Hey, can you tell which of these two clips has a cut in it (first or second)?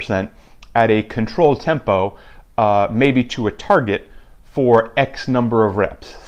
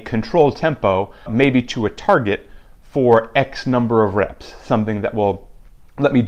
second